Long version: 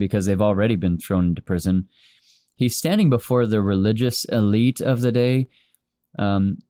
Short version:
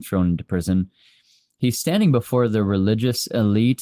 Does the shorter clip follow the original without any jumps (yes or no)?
yes